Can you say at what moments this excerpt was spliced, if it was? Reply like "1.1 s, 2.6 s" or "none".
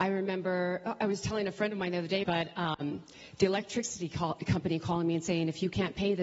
2.2 s